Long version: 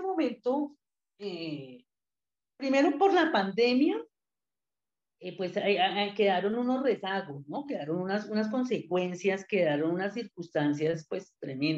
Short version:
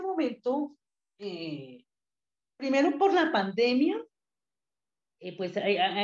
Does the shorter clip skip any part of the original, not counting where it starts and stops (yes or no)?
no